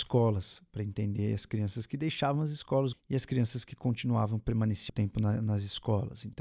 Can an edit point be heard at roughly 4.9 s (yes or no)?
yes